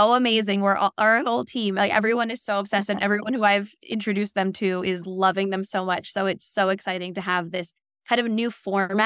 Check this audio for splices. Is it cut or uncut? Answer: uncut